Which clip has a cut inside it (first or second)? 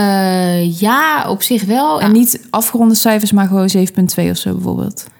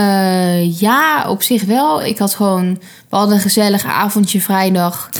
first